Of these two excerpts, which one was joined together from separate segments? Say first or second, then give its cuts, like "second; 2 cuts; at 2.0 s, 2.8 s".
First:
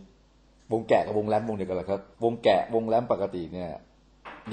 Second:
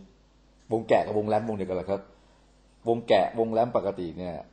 first; 1 cut; at 2.1 s